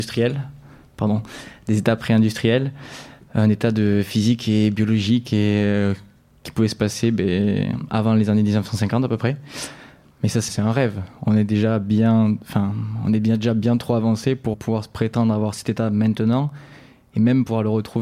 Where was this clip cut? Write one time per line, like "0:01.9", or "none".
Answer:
0:10.5
0:14.5